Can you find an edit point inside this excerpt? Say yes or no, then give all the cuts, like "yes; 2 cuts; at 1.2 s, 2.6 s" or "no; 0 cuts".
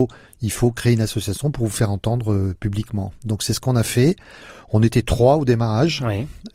no; 0 cuts